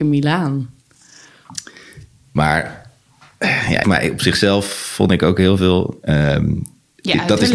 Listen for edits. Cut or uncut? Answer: cut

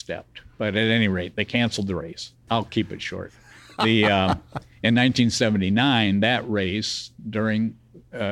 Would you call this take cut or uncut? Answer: cut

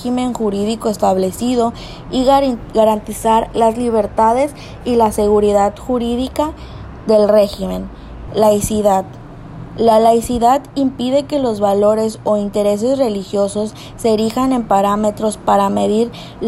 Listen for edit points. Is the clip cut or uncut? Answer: cut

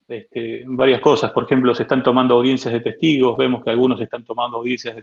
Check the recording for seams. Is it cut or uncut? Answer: uncut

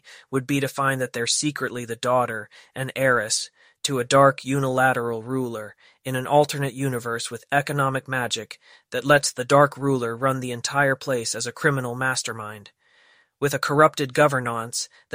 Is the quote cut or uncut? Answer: uncut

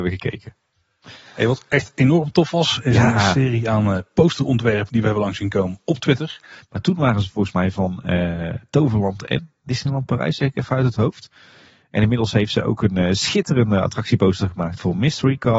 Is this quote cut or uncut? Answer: cut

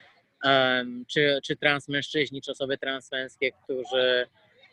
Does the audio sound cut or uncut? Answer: uncut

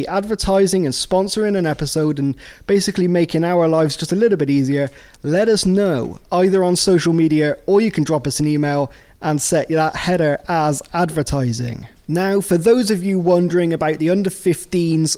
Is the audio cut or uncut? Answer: cut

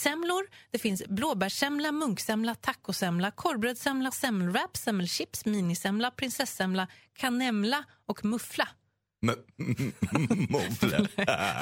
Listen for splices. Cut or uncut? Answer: cut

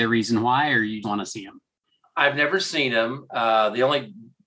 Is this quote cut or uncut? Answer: cut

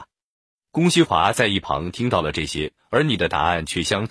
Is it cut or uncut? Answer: cut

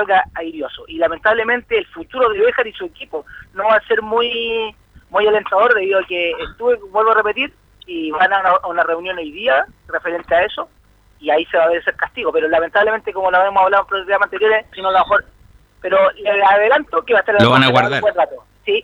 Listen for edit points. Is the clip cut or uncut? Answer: cut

